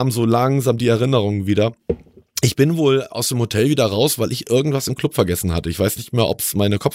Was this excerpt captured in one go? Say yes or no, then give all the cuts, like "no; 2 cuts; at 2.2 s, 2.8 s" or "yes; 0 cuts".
yes; 0 cuts